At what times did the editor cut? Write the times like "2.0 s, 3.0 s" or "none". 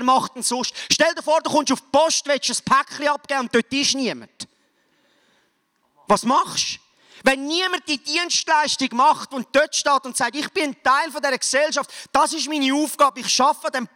none